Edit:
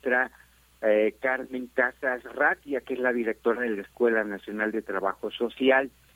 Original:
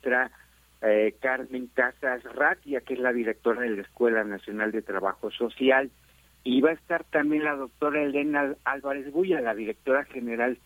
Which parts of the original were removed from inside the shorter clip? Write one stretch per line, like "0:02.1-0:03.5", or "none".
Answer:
none